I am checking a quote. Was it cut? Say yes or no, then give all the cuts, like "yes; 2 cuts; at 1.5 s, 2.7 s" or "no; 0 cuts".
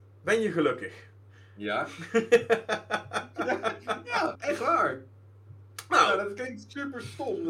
yes; 1 cut; at 4.3 s